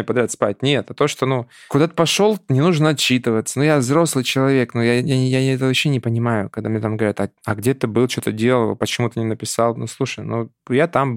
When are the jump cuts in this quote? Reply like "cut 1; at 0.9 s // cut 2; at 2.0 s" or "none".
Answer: none